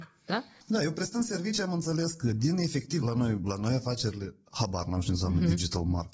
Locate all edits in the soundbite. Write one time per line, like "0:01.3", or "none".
0:03.0